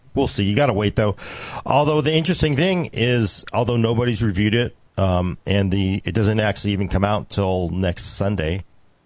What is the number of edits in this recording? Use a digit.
1